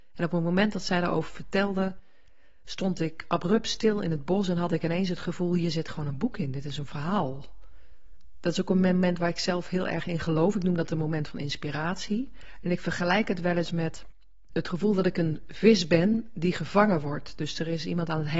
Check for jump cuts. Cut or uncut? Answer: uncut